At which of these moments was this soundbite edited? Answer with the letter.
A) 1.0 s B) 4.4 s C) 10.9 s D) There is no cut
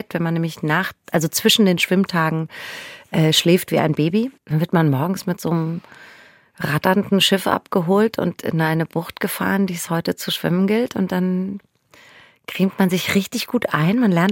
B